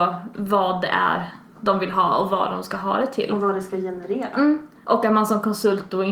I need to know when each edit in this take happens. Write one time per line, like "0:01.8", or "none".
none